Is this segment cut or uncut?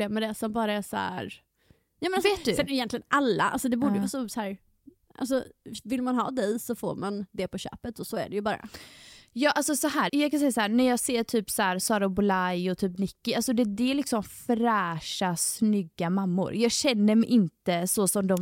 cut